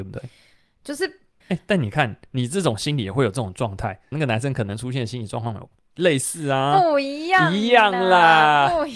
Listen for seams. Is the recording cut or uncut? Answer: cut